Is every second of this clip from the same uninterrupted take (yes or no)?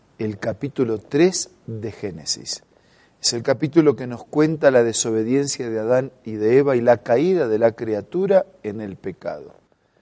yes